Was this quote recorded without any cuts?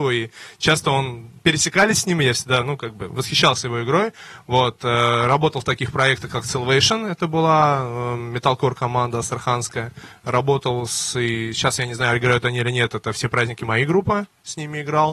yes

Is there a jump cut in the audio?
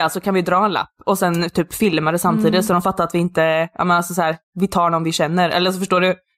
no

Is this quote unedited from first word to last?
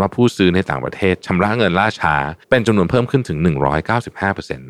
no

